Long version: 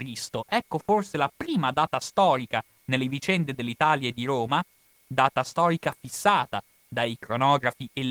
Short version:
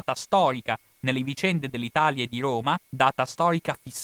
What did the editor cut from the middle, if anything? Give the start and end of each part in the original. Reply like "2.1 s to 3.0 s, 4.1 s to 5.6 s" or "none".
4.7 s to 5.0 s